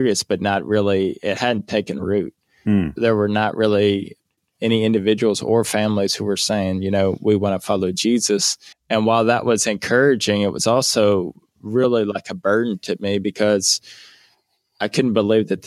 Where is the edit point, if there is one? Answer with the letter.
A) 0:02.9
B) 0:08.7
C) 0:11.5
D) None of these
B